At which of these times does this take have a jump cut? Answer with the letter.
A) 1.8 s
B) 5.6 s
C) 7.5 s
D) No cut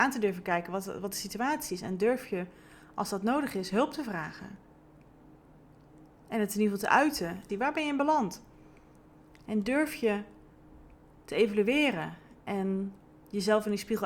C